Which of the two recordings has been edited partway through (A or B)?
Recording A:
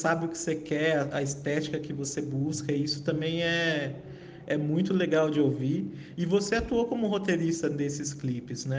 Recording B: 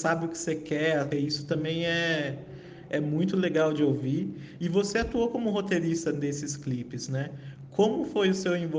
B